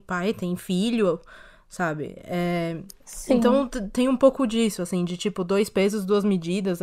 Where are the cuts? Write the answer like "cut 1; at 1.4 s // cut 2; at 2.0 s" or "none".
none